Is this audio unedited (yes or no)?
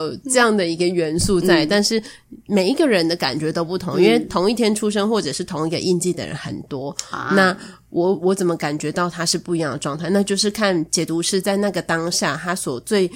yes